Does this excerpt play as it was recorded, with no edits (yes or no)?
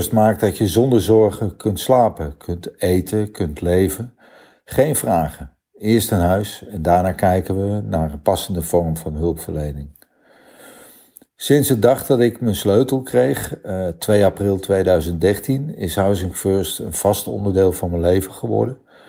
yes